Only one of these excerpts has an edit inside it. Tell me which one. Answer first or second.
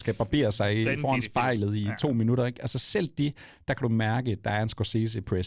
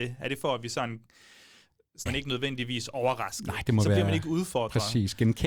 second